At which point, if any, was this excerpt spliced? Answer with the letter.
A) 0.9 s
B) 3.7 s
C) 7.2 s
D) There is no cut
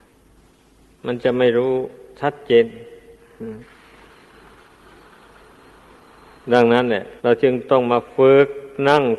C